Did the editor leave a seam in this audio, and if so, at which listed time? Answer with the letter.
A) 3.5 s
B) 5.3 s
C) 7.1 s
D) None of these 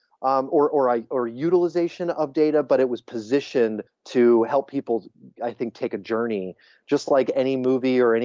D